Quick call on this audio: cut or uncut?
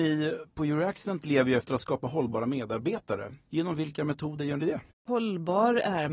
cut